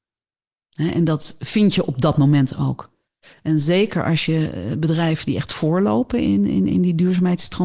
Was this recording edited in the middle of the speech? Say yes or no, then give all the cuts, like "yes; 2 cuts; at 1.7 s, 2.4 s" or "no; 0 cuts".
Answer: no; 0 cuts